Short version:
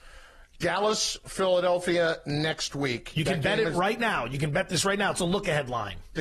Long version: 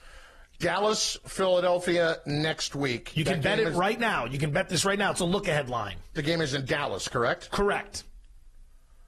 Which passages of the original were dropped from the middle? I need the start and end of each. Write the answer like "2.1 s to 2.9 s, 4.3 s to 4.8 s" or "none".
none